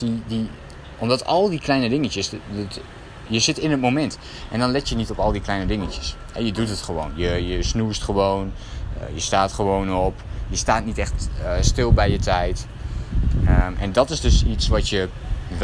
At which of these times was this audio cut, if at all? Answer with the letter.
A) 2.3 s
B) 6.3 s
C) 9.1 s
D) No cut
D